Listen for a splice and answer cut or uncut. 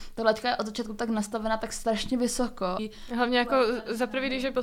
uncut